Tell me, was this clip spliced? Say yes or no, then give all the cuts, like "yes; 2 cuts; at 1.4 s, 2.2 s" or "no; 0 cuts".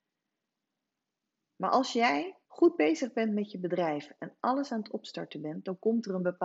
yes; 2 cuts; at 1.4 s, 2.4 s